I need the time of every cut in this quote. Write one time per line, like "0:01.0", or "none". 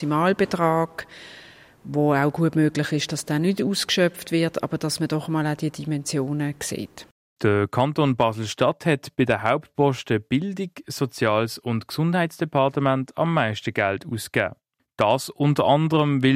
none